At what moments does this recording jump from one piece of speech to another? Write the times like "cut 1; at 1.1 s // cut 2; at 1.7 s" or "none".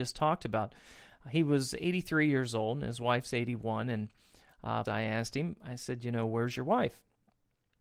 cut 1; at 4.9 s